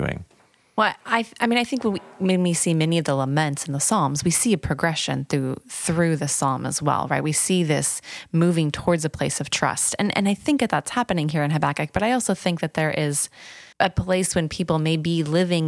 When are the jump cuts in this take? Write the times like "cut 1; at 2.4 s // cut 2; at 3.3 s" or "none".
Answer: cut 1; at 13.7 s